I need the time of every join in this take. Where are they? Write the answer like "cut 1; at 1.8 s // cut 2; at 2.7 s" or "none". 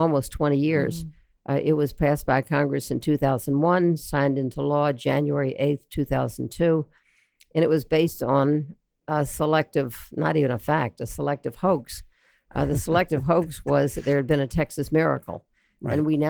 none